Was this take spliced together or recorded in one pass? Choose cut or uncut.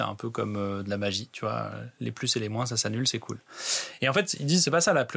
uncut